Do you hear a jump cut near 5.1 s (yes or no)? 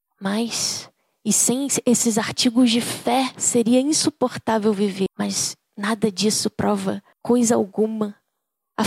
yes